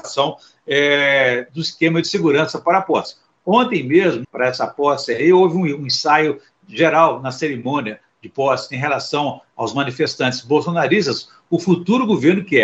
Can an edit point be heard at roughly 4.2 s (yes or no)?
yes